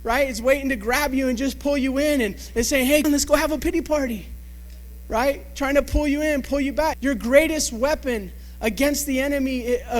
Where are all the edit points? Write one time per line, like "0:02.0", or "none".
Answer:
0:03.0
0:06.9